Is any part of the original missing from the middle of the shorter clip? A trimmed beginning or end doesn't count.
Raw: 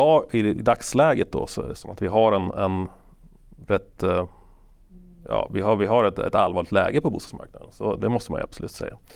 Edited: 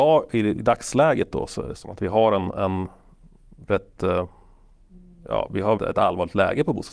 yes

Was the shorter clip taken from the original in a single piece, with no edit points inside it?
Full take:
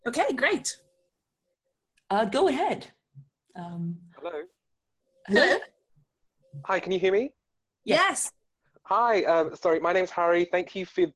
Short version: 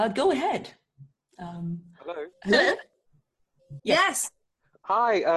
no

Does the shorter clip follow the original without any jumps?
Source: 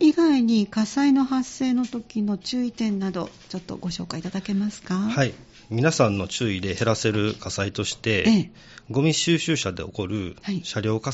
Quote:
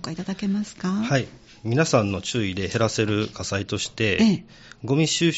yes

